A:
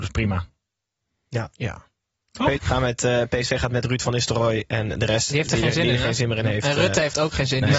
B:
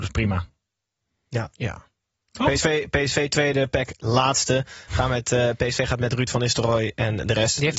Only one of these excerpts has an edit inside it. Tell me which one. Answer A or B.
A